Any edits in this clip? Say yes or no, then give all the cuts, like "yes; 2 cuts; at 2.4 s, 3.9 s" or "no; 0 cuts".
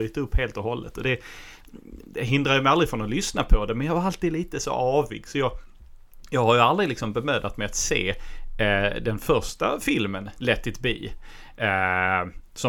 no; 0 cuts